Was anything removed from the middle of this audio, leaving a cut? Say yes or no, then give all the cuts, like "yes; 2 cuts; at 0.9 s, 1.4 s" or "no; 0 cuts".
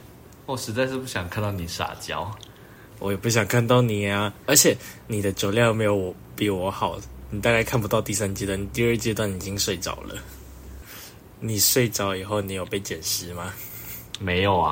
no; 0 cuts